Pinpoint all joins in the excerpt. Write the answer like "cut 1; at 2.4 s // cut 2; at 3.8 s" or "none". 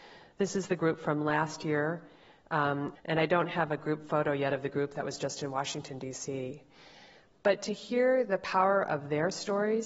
cut 1; at 3.0 s